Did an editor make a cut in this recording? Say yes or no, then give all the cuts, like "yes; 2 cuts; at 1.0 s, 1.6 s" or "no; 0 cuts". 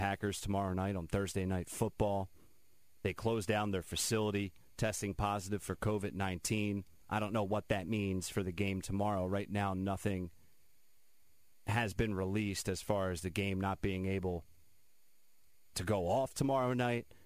yes; 2 cuts; at 3.0 s, 15.7 s